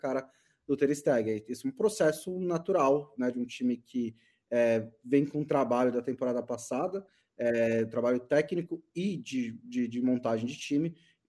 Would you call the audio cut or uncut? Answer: uncut